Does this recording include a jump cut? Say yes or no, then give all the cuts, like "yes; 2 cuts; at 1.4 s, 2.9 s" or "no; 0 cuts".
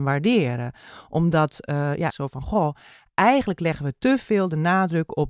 yes; 1 cut; at 2.1 s